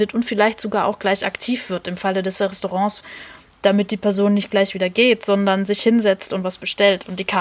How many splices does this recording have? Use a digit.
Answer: 0